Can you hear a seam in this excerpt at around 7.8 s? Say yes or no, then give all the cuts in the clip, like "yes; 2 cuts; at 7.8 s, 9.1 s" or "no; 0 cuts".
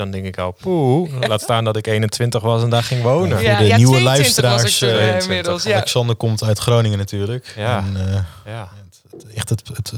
no; 0 cuts